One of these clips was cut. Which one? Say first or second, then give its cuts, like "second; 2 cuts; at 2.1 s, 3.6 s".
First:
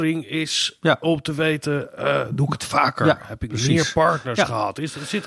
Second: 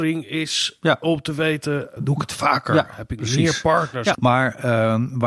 second; 2 cuts; at 2.0 s, 4.1 s